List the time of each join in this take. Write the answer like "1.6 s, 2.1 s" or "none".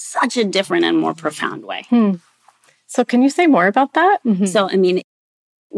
4.2 s